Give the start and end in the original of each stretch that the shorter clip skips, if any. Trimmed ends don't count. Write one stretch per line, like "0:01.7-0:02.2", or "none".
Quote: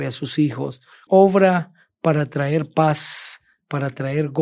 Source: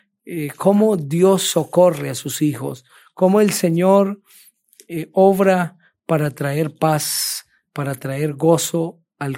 0:03.1-0:05.1